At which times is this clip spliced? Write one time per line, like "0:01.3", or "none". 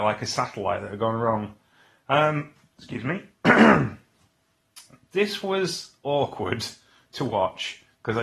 none